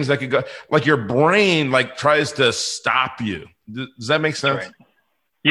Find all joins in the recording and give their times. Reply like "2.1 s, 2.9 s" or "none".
none